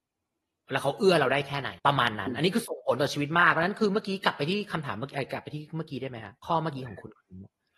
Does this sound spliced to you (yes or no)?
yes